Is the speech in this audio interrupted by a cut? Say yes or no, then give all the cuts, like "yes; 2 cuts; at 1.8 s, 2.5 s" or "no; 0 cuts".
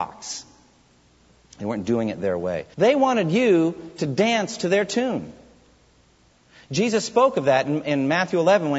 yes; 1 cut; at 2.7 s